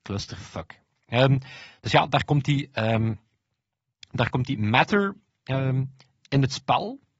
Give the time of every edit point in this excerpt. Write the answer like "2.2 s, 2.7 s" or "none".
none